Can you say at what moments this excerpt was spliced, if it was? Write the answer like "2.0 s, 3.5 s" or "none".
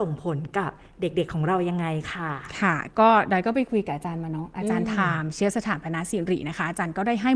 none